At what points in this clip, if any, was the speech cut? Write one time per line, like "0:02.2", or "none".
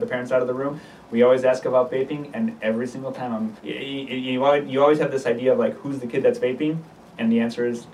0:03.6